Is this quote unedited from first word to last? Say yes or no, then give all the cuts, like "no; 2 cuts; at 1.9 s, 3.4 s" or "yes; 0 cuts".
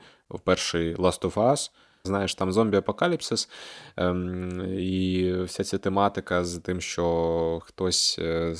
no; 1 cut; at 2.0 s